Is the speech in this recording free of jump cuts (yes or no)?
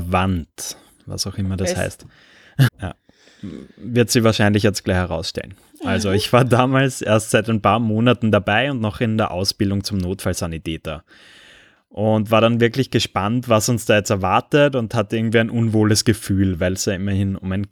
no